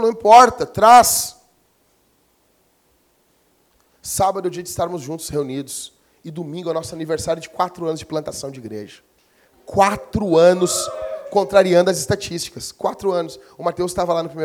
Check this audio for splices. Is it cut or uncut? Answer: uncut